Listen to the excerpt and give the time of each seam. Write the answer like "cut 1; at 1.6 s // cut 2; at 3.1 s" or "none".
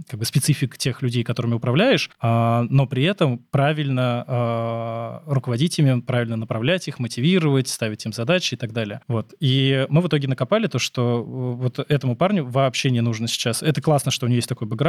none